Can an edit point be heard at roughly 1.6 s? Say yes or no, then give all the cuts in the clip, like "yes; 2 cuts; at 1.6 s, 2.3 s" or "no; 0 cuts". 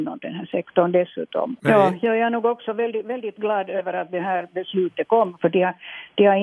yes; 2 cuts; at 1.6 s, 5.4 s